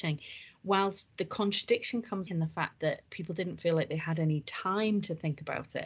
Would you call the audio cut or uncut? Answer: cut